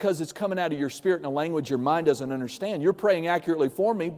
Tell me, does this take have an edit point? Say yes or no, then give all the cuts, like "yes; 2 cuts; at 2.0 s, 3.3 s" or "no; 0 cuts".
no; 0 cuts